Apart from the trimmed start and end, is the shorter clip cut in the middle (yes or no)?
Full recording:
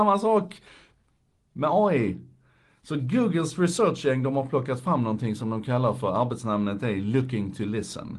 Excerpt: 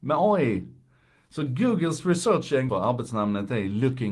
yes